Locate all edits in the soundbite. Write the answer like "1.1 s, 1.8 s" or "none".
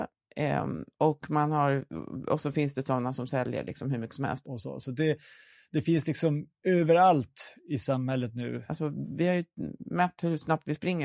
4.4 s, 8.7 s